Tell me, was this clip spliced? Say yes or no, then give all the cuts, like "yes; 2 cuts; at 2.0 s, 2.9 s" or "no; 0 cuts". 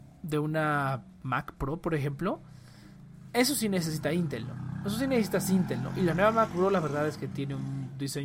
no; 0 cuts